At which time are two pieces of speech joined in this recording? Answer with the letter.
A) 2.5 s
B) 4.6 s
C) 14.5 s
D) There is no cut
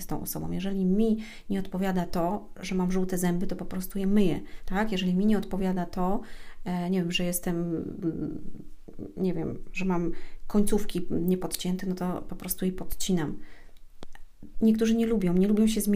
C